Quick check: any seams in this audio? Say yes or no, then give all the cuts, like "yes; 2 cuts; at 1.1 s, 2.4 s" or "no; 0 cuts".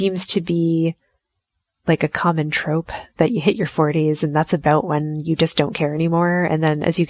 no; 0 cuts